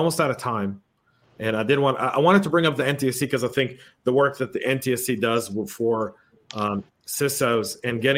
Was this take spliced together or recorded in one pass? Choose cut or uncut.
uncut